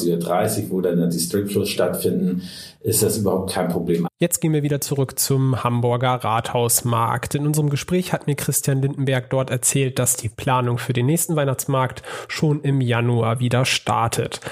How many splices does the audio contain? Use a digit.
1